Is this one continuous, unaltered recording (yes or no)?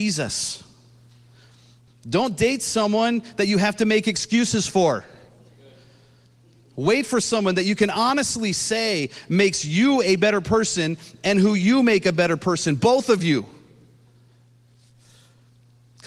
no